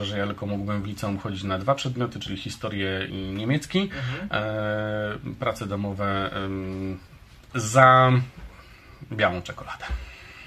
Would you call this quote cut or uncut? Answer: cut